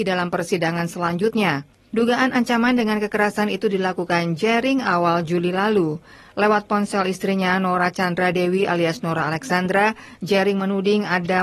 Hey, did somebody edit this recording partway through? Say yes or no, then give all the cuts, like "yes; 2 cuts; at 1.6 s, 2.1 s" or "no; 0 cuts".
yes; 1 cut; at 1.9 s